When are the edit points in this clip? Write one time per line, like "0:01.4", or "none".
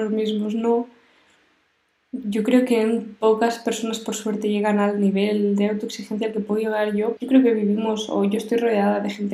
0:07.2